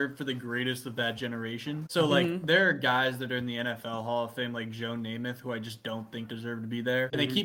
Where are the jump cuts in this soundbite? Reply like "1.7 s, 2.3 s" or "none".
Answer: none